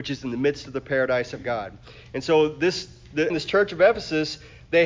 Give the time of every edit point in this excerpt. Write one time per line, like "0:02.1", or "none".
0:03.3